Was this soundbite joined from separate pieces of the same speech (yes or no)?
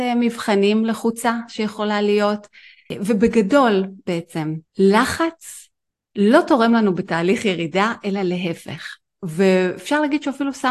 yes